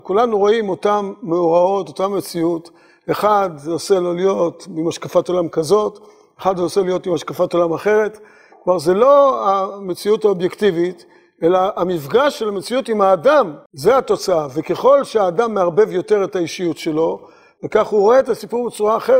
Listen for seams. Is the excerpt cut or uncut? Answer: cut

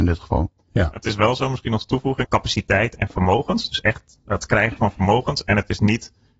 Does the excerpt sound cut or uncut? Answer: cut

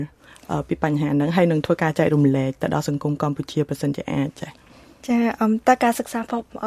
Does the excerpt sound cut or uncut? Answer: uncut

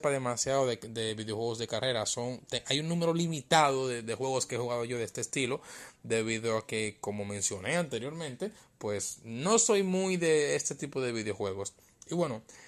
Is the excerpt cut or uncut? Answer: uncut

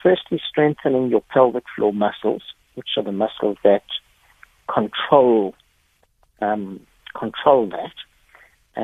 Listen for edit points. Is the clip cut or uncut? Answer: uncut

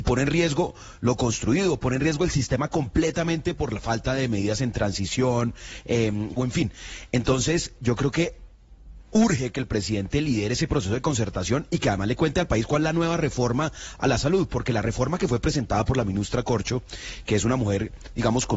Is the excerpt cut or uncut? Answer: cut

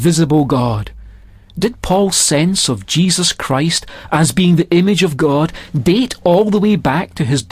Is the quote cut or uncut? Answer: uncut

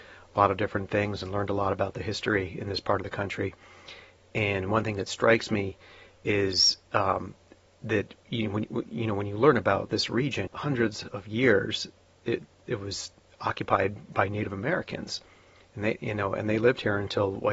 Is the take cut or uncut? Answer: cut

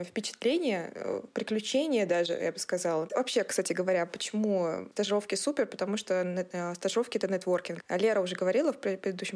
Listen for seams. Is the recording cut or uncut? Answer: cut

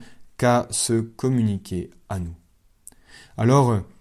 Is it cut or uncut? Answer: uncut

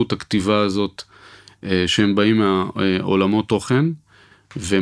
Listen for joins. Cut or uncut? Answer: uncut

